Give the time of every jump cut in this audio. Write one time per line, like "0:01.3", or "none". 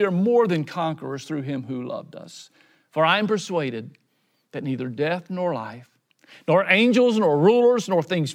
none